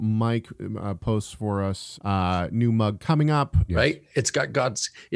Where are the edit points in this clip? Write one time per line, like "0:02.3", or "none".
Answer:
0:02.0
0:03.7